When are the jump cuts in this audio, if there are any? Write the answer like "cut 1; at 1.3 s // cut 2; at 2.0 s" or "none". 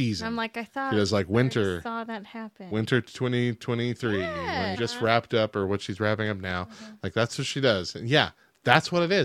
cut 1; at 4.7 s